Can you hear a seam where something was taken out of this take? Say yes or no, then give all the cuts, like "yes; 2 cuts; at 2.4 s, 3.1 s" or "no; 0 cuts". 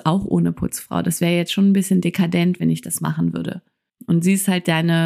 yes; 1 cut; at 4.0 s